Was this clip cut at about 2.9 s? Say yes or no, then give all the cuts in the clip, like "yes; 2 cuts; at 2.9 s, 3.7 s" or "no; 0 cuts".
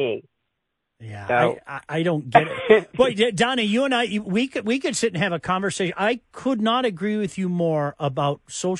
no; 0 cuts